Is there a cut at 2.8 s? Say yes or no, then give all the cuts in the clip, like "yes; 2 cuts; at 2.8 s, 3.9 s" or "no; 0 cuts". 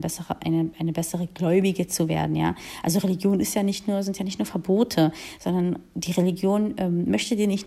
no; 0 cuts